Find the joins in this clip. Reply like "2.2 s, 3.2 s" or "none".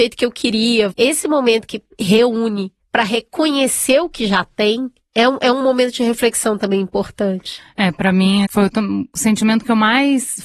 0.9 s, 8.5 s